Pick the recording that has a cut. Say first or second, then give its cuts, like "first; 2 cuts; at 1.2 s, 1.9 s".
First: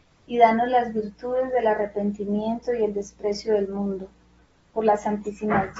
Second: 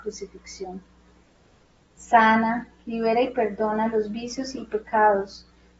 second; 1 cut; at 1.8 s